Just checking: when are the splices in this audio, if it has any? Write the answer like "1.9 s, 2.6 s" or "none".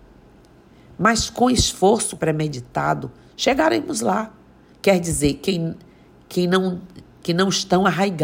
2.2 s, 4.7 s